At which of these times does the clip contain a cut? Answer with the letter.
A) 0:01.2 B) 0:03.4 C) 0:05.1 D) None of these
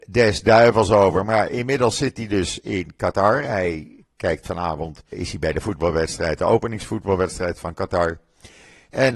C